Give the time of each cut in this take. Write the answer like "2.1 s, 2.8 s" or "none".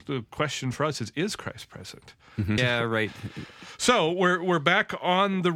2.6 s